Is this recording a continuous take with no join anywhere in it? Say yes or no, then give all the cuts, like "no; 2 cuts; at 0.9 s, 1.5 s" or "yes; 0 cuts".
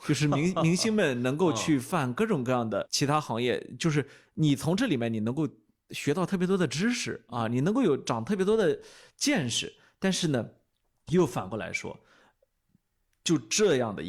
yes; 0 cuts